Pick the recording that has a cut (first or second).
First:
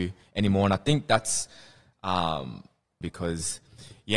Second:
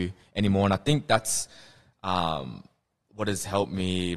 first